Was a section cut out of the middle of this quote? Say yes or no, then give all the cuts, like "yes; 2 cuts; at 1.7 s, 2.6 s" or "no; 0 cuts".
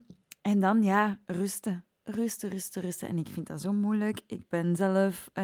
no; 0 cuts